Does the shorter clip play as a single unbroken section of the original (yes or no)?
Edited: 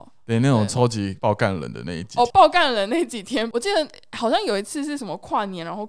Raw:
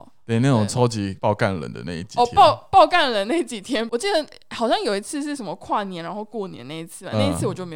no